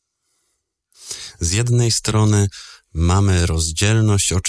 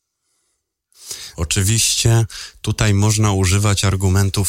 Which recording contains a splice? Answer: second; 1 cut; at 1.3 s

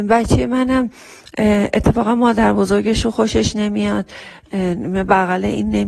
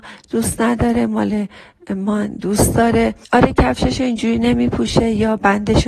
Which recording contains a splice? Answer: second; 1 cut; at 3.2 s

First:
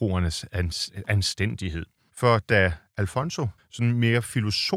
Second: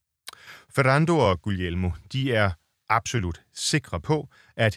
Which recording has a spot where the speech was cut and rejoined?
first; 2 cuts; at 2.1 s, 3.6 s

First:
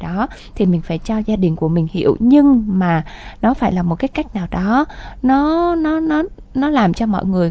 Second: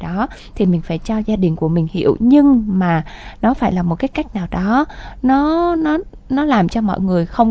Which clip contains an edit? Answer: second; 1 cut; at 5.8 s

